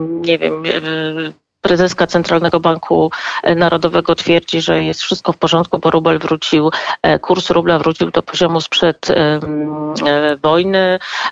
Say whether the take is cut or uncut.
uncut